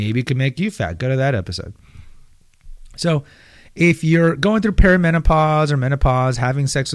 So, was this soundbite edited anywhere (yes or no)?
no